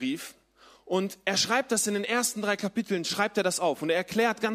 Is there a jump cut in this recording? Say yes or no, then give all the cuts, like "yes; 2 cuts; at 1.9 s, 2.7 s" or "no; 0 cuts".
no; 0 cuts